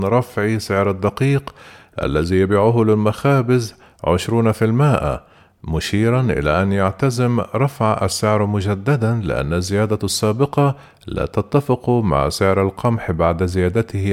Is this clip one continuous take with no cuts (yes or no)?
yes